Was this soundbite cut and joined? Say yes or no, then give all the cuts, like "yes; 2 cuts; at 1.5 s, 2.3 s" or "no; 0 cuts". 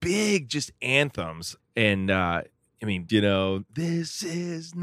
yes; 2 cuts; at 1.6 s, 3.1 s